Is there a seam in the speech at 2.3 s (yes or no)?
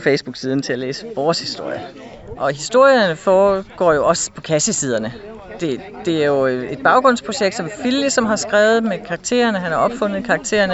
yes